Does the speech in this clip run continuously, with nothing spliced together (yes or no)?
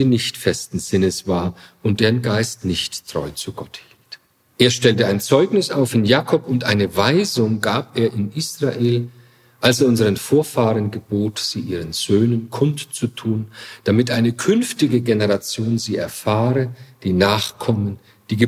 no